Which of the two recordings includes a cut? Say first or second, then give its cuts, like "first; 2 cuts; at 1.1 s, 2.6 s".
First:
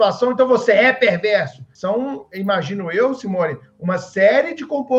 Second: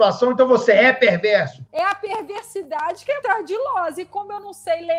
second; 2 cuts; at 1.7 s, 3.2 s